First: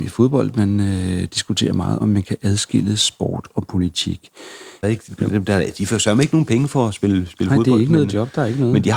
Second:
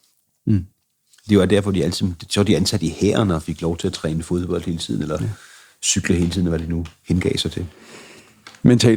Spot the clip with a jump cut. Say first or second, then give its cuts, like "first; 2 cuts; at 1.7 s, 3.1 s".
first; 2 cuts; at 2.0 s, 4.8 s